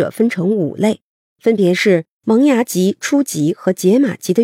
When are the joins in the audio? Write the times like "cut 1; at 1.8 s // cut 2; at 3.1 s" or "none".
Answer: cut 1; at 2.2 s

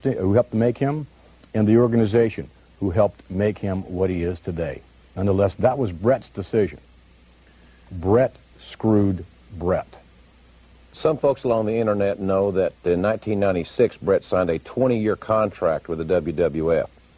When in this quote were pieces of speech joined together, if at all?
none

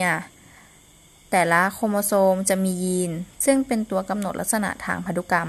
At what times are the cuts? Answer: cut 1; at 3.3 s

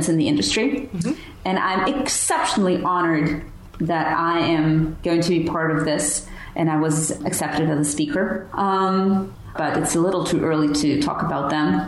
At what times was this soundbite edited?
cut 1; at 8.5 s // cut 2; at 9.5 s

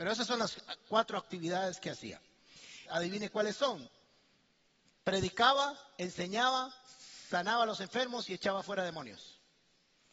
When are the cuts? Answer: cut 1; at 2.9 s // cut 2; at 5.0 s

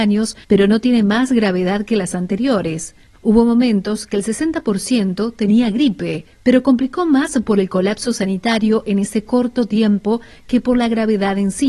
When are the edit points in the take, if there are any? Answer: cut 1; at 3.1 s // cut 2; at 6.3 s

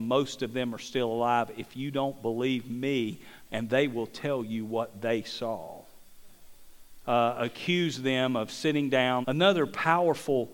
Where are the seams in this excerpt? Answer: cut 1; at 3.5 s // cut 2; at 7.0 s // cut 3; at 9.2 s

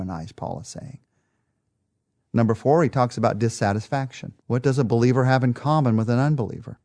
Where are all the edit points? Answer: cut 1; at 4.4 s

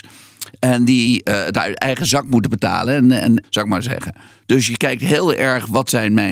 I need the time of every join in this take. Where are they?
cut 1; at 3.4 s

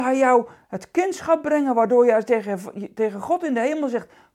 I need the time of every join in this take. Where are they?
none

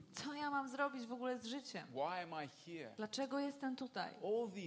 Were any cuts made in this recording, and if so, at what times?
none

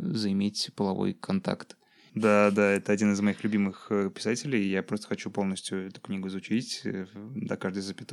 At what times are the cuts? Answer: cut 1; at 2.1 s

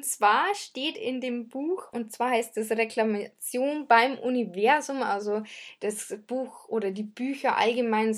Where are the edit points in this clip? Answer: none

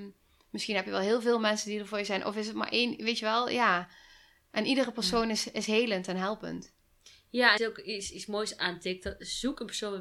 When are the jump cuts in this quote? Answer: cut 1; at 7.6 s

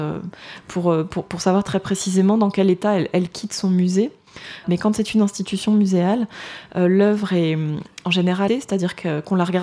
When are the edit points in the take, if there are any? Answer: cut 1; at 4.6 s // cut 2; at 8.5 s

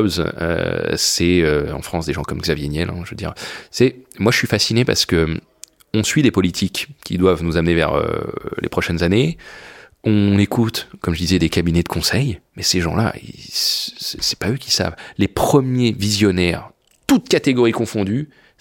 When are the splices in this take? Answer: cut 1; at 12.5 s

